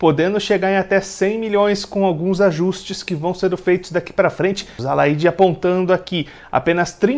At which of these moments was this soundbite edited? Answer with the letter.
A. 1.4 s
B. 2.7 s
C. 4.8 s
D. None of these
C